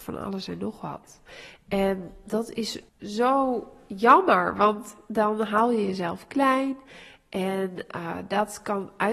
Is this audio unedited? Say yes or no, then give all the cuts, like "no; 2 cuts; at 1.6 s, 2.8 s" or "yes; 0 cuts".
no; 1 cut; at 2.9 s